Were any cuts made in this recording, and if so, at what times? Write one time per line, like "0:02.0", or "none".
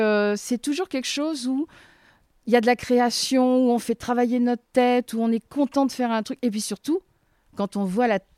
none